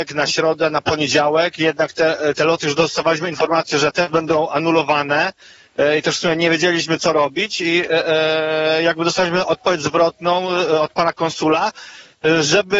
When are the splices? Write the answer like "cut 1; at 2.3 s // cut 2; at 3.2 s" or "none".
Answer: none